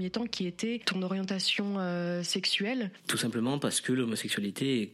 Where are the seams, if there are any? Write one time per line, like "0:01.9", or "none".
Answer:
0:03.0

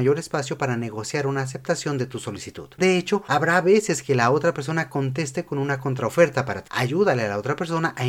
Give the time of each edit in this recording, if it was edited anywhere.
0:06.7

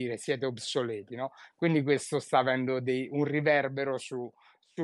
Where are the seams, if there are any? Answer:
none

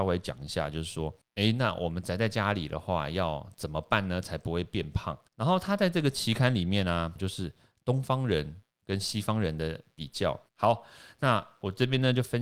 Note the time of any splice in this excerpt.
0:07.2
0:10.5

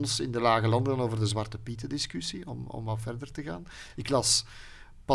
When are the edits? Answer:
none

